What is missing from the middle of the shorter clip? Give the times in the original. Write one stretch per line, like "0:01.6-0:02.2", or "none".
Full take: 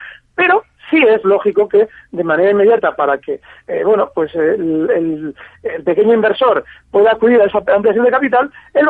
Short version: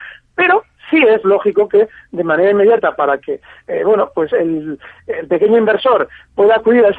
0:04.3-0:04.9